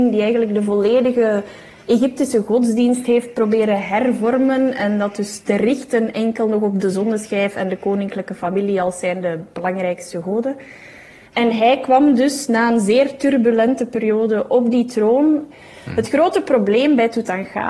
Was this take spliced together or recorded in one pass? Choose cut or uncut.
uncut